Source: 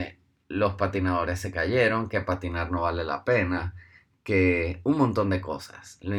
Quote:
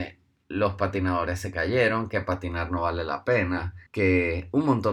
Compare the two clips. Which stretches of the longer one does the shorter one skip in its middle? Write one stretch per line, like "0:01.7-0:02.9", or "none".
0:03.9-0:04.2